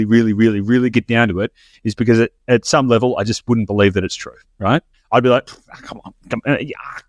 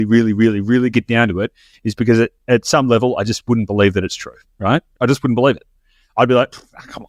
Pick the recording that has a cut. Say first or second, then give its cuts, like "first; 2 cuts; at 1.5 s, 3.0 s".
first; 1 cut; at 4.9 s